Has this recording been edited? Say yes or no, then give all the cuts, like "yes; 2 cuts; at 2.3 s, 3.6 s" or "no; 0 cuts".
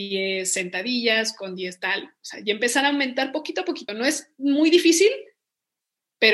no; 0 cuts